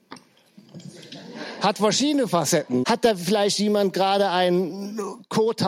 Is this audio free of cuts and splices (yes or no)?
no